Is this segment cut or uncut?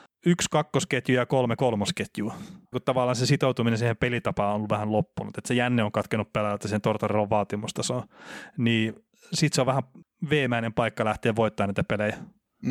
cut